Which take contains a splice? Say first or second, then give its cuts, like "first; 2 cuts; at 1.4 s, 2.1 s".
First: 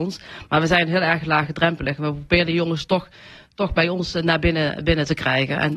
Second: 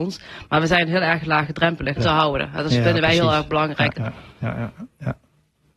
second; 2 cuts; at 2.0 s, 3.9 s